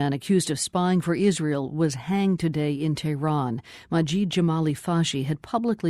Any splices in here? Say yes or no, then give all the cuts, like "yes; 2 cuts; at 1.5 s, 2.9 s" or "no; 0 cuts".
no; 0 cuts